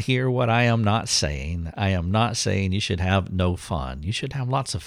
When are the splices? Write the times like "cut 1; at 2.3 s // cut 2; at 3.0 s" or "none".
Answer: none